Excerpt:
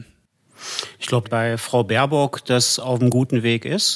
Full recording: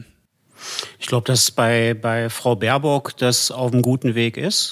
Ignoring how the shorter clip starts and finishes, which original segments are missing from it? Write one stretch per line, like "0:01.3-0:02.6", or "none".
0:01.2-0:02.0

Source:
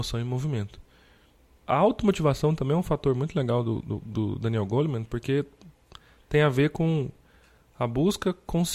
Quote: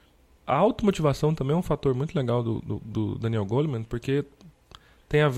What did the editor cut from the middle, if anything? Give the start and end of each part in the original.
none

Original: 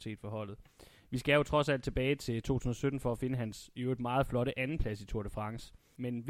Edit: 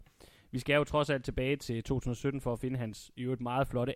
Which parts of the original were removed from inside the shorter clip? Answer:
none

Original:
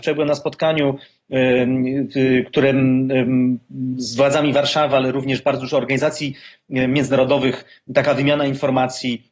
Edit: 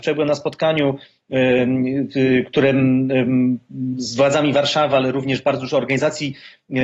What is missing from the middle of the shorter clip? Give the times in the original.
none

